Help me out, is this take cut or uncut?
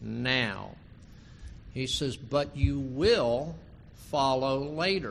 uncut